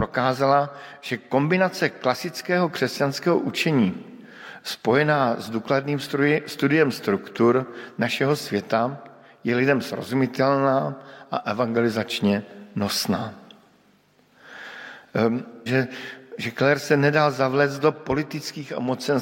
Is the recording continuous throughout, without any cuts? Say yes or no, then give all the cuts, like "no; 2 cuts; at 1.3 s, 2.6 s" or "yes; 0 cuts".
no; 1 cut; at 15.7 s